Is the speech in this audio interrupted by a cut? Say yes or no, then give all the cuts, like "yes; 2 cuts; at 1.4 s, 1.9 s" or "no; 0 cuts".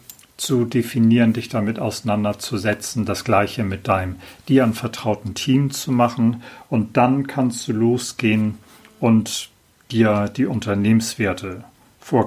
no; 0 cuts